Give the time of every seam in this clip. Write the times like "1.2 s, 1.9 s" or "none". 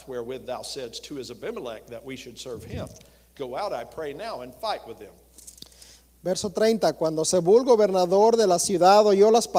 3.3 s

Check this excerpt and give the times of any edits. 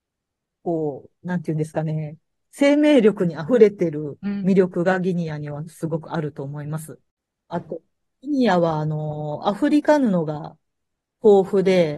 none

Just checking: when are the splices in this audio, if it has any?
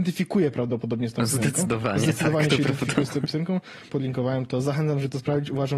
3.9 s

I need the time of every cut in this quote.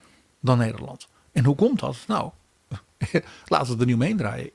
none

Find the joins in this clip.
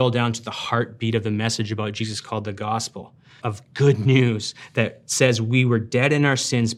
3.4 s

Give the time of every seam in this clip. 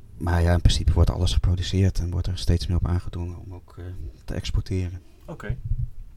none

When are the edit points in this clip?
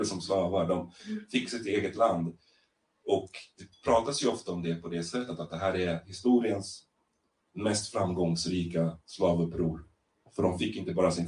none

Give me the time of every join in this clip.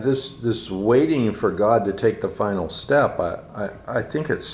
none

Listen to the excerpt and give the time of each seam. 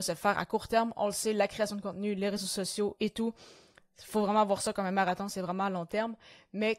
none

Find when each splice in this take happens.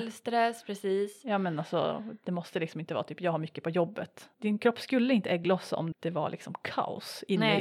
4.3 s, 5.9 s

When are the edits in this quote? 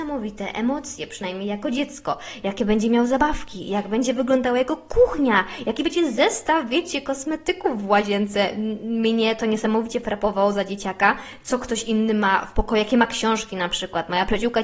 none

